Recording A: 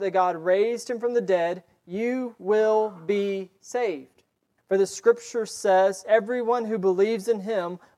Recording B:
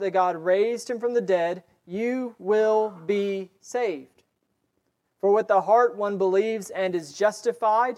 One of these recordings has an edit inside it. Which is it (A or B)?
A